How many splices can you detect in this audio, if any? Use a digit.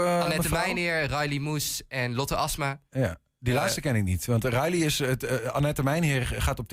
0